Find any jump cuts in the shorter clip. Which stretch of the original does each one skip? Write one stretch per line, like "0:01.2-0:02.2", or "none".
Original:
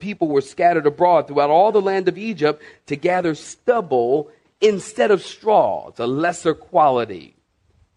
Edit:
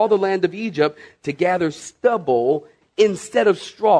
none